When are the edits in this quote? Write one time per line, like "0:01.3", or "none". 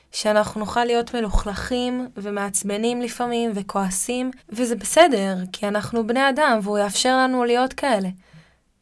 0:04.4